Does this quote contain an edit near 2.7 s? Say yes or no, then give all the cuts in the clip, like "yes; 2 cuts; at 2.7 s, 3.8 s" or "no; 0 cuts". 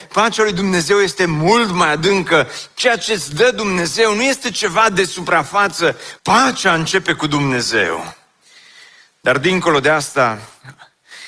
yes; 2 cuts; at 2.7 s, 6.2 s